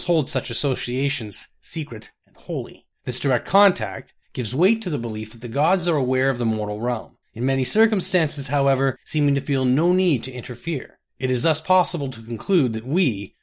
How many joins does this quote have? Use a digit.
1